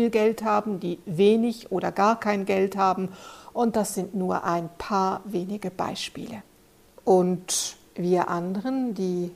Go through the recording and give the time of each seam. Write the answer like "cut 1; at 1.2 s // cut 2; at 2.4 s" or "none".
cut 1; at 7.0 s